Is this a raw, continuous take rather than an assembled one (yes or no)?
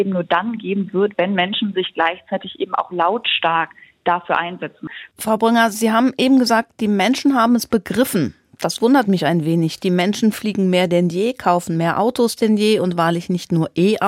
yes